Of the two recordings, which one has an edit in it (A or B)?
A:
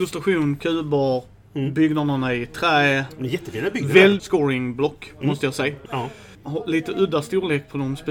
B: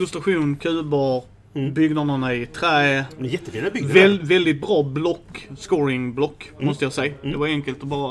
A